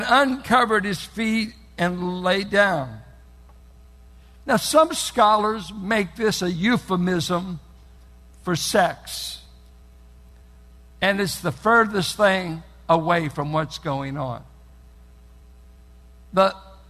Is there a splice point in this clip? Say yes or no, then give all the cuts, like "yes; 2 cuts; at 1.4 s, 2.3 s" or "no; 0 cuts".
no; 0 cuts